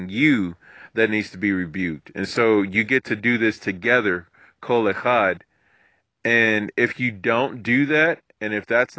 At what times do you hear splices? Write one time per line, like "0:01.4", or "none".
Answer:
none